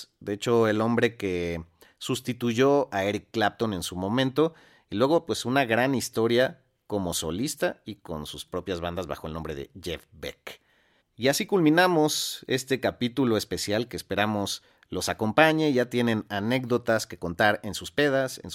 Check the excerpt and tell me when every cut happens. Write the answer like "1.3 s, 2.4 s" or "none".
11.0 s